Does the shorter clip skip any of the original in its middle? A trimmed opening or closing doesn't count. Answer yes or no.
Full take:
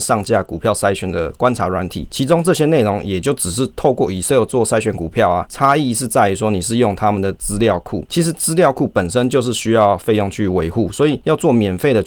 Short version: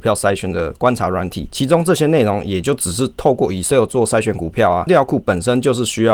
yes